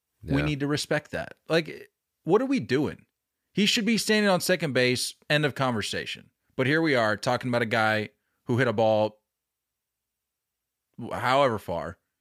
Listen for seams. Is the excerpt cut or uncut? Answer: uncut